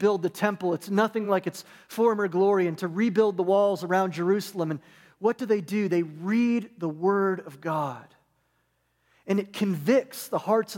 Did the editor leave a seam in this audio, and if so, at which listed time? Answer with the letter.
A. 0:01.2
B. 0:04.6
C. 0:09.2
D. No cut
D